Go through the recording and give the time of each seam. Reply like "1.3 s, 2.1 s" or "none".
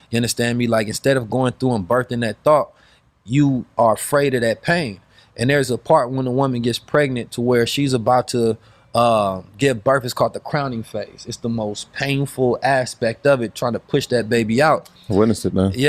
none